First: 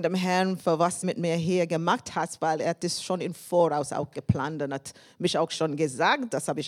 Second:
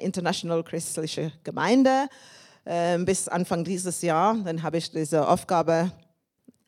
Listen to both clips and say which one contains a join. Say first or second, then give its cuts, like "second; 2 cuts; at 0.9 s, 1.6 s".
first; 1 cut; at 1.0 s